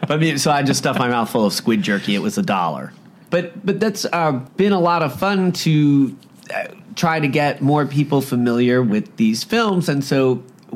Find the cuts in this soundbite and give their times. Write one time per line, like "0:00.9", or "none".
0:03.3
0:04.5